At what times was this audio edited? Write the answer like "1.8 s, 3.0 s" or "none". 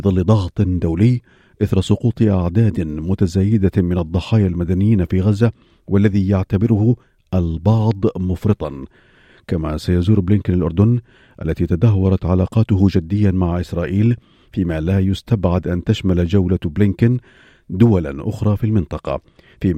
none